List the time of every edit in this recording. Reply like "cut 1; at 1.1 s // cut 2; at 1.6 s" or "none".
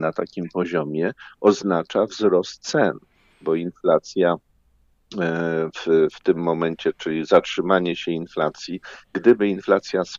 none